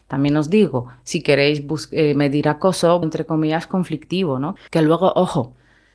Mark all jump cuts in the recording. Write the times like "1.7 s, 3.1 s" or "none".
3.0 s, 4.6 s